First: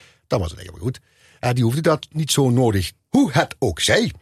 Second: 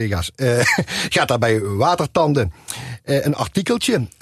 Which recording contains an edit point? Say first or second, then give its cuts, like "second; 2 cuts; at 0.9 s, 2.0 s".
first; 1 cut; at 3.0 s